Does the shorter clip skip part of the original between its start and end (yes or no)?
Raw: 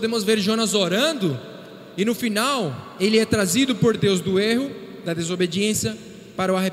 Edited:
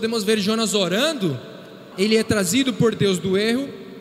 yes